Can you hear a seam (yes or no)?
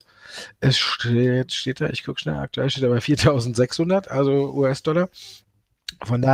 no